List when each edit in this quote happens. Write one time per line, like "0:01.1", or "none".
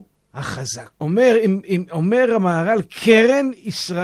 0:00.9